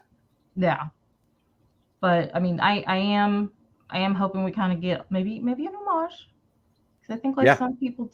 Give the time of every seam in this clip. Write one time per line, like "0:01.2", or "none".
none